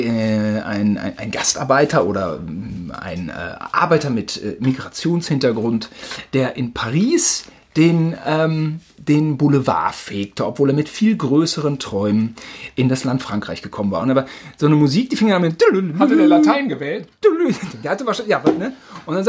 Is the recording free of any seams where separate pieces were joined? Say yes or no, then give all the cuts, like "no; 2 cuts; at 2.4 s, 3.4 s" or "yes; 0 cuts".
yes; 0 cuts